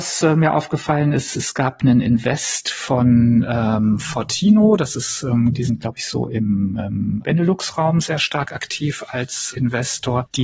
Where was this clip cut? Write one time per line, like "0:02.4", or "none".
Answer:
0:07.2
0:09.5